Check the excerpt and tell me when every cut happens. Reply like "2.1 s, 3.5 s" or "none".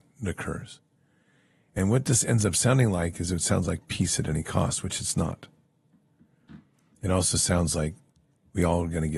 none

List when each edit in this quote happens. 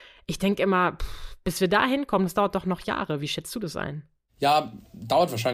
none

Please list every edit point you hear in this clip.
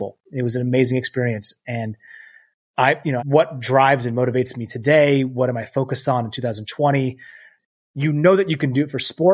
3.2 s, 7.6 s

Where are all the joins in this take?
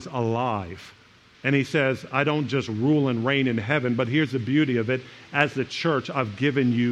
1.3 s

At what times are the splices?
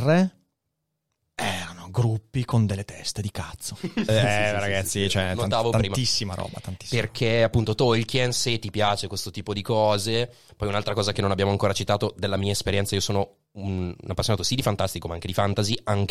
4.1 s, 10.5 s

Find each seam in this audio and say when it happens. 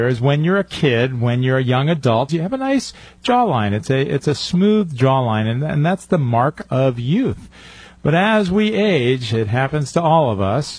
2.3 s

